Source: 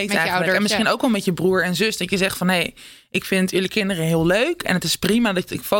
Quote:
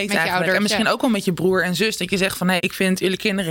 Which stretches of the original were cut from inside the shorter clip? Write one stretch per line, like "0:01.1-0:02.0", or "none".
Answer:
0:02.6-0:03.1